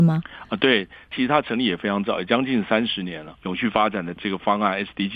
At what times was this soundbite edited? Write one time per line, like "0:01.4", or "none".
0:03.4

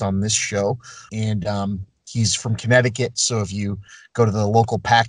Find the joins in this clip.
0:01.1

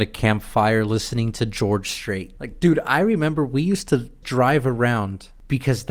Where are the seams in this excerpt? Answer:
0:02.4
0:04.2

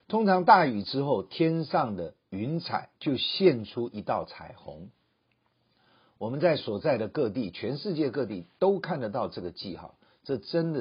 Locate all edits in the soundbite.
0:03.0

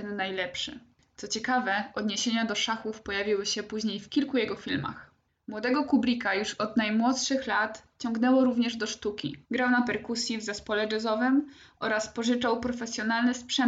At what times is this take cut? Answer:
0:09.4

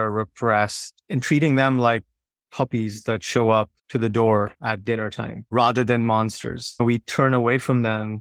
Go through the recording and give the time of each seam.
0:01.0
0:03.8

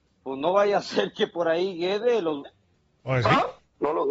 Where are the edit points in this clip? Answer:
0:02.4

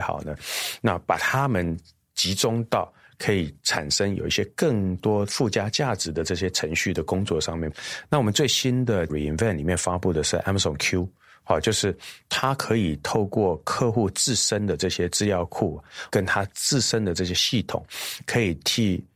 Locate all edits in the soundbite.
none

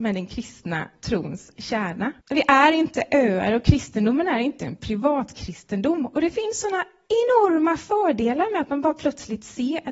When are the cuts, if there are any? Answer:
0:02.2

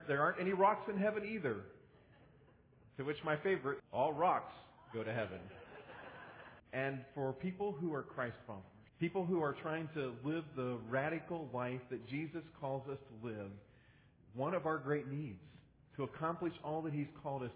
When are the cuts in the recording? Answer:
0:03.8
0:06.6
0:08.9

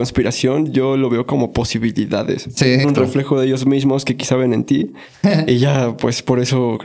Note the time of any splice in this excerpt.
0:02.8

